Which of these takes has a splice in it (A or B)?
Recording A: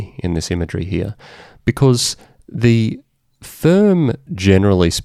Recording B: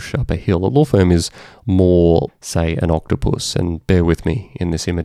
B